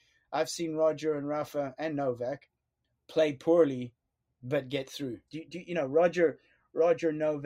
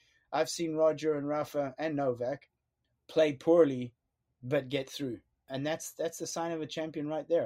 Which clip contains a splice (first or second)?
first